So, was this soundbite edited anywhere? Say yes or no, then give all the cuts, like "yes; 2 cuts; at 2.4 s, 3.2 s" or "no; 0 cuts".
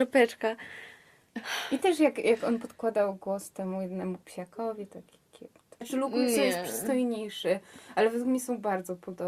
yes; 1 cut; at 5.8 s